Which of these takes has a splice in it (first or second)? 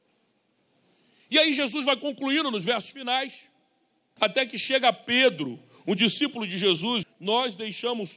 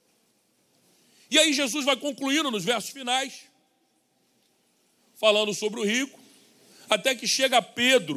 first